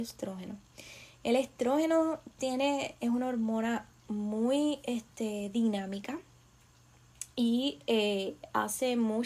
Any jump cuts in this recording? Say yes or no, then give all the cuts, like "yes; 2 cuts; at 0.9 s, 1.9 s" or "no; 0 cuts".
no; 0 cuts